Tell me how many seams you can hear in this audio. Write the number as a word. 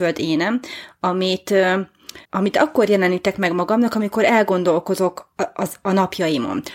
one